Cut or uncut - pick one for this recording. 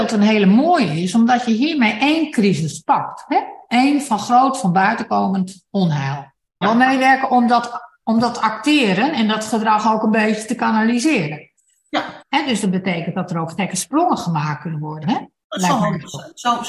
cut